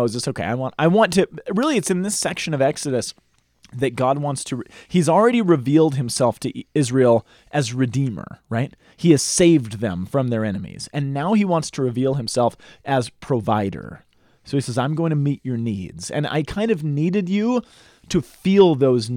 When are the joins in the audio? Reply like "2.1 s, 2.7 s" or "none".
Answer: none